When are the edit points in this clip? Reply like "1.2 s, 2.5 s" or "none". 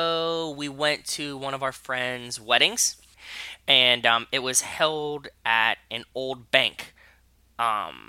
none

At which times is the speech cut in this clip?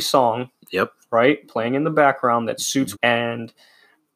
2.9 s

